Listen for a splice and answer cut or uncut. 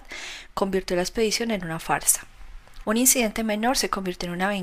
cut